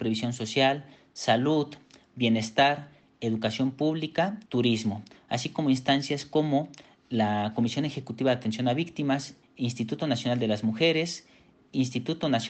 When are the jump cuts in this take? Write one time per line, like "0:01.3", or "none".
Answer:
0:04.4
0:09.4